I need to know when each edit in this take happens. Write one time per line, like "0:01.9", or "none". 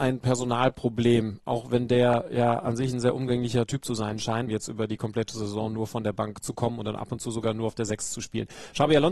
0:04.5